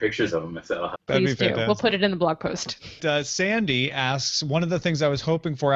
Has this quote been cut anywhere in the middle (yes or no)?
yes